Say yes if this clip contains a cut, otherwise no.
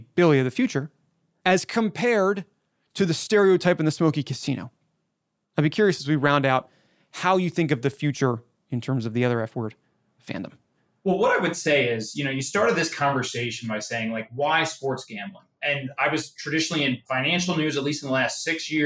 no